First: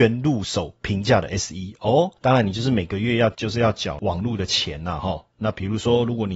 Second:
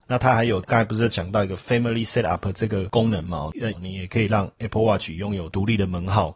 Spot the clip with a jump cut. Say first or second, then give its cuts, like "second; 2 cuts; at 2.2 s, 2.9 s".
second; 1 cut; at 3.7 s